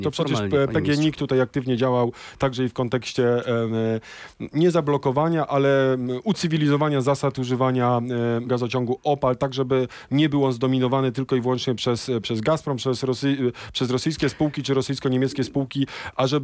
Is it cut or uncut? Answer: cut